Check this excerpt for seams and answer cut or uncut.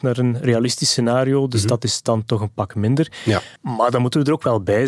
cut